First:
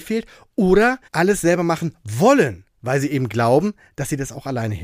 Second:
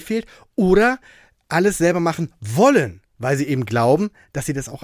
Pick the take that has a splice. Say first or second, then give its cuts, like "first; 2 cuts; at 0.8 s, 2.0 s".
first; 1 cut; at 1.1 s